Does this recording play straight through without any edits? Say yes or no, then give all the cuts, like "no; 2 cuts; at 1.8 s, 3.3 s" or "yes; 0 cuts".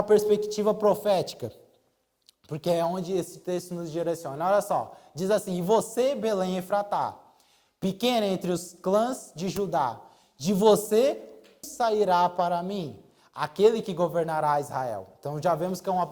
no; 1 cut; at 11.6 s